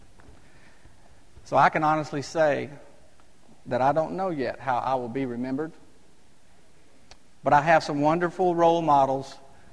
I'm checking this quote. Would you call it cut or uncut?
uncut